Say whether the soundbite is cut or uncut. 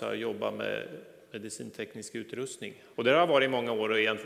cut